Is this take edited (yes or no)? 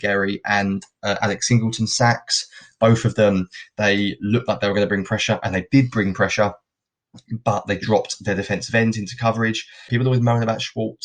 yes